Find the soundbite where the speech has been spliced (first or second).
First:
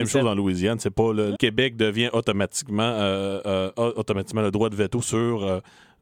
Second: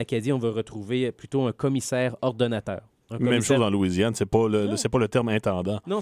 first